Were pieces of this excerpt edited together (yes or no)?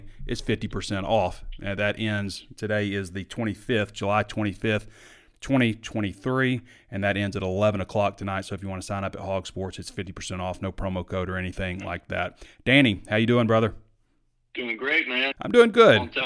yes